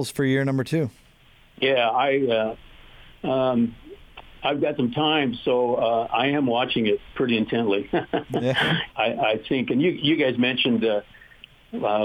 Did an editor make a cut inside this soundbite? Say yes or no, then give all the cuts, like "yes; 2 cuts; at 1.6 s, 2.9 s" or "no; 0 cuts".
yes; 1 cut; at 8.9 s